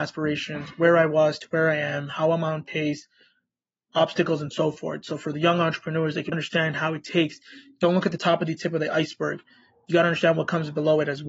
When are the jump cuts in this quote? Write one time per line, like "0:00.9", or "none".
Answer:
0:06.3